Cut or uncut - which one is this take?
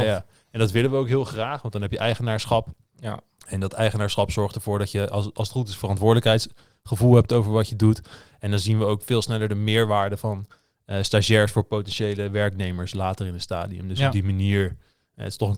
uncut